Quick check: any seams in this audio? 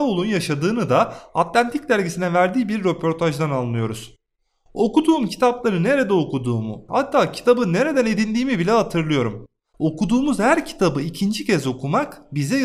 yes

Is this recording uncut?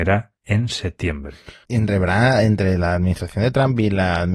no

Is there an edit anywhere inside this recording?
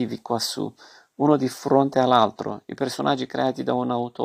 no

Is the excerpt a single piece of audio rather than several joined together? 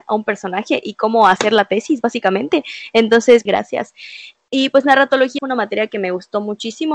no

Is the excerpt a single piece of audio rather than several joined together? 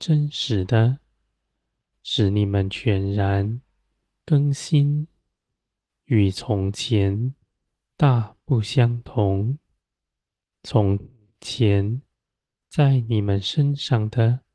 yes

